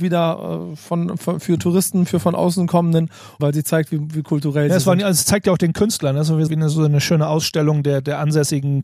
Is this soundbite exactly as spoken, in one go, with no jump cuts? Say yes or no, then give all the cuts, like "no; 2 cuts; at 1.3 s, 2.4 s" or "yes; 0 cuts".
no; 2 cuts; at 3.4 s, 6.5 s